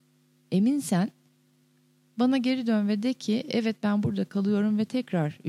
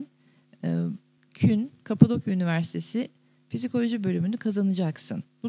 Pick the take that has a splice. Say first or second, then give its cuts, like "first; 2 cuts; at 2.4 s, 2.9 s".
second; 1 cut; at 1.2 s